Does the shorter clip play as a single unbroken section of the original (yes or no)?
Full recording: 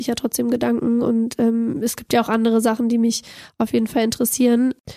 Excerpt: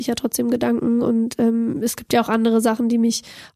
yes